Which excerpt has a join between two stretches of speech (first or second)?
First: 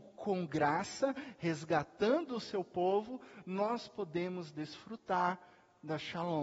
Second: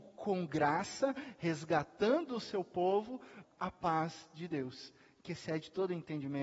second